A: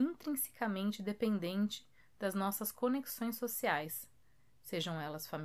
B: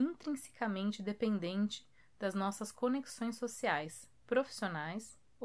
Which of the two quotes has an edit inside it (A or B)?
B